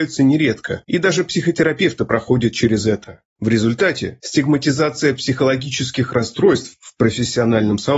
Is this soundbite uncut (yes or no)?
no